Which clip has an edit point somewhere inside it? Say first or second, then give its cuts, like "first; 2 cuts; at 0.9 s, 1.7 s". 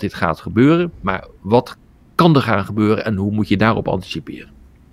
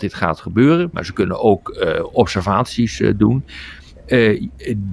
second; 1 cut; at 0.9 s